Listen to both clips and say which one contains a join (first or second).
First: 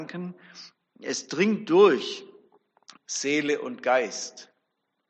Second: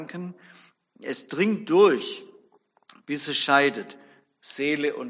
first